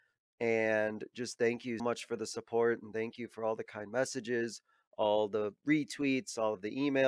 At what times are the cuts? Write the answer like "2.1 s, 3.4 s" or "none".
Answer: 1.8 s